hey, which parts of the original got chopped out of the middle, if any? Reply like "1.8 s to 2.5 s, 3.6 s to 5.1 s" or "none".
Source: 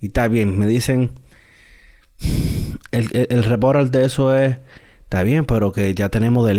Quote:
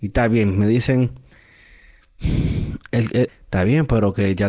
3.3 s to 4.9 s